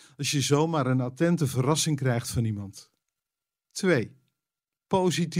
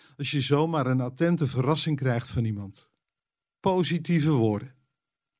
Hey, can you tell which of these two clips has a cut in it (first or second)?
second